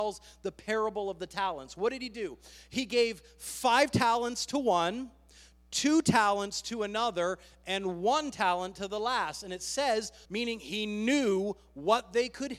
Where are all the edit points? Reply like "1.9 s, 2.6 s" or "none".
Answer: 10.2 s